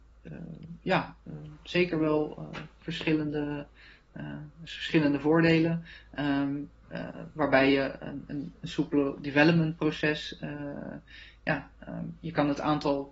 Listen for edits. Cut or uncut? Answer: uncut